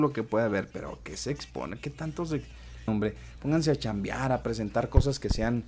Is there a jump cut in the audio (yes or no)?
yes